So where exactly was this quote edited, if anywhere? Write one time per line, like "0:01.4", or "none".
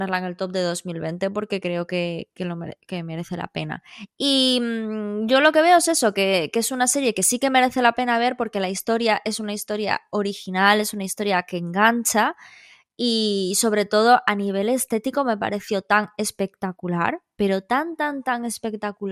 0:04.1